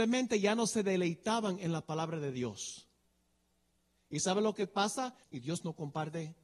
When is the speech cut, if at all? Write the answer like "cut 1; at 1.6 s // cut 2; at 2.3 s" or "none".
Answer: cut 1; at 4.0 s // cut 2; at 5.2 s